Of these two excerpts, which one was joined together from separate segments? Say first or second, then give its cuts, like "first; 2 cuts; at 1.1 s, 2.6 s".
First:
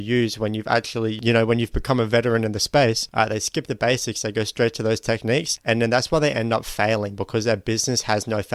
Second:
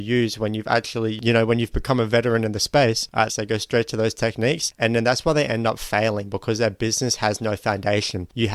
second; 1 cut; at 3.3 s